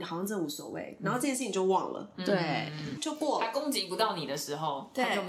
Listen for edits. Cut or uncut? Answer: cut